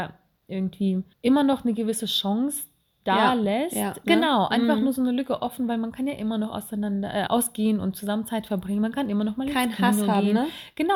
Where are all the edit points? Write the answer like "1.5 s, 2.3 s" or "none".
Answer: 1.1 s, 4.0 s, 7.3 s